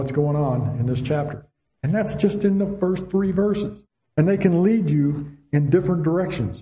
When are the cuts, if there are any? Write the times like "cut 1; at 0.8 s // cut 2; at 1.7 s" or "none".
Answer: none